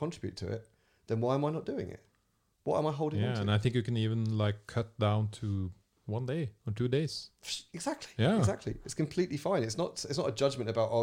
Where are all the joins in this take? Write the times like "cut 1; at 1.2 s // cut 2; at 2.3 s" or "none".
none